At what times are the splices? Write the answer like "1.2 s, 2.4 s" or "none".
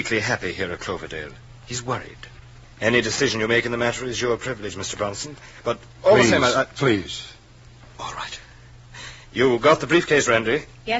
2.6 s